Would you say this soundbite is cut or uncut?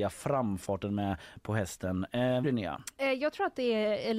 cut